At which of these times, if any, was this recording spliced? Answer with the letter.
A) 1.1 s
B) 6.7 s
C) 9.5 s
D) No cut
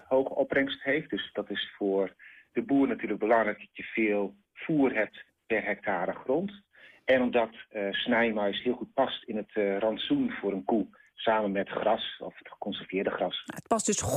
D